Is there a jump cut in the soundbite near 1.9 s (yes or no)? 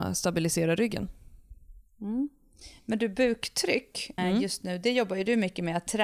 no